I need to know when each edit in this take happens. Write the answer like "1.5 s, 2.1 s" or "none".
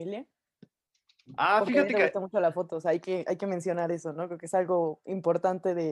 none